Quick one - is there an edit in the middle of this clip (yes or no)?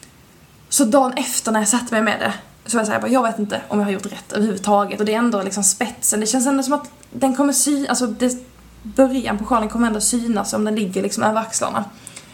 no